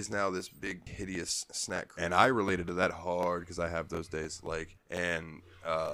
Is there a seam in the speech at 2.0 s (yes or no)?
yes